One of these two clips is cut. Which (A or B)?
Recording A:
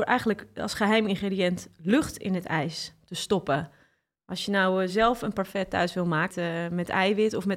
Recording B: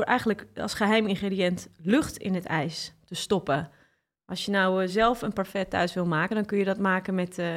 A